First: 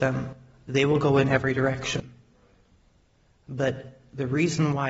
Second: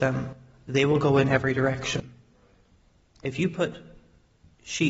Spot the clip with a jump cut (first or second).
second